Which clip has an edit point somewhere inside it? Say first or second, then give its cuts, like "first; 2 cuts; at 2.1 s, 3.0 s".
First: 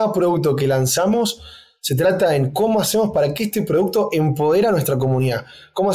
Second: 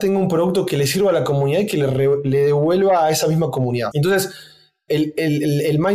second; 1 cut; at 3.9 s